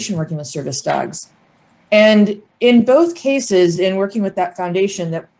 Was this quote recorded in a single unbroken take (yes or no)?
yes